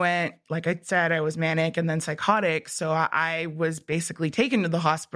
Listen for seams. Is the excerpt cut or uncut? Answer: uncut